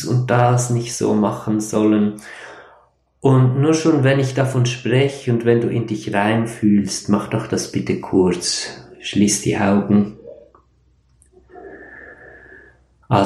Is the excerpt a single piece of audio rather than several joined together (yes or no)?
yes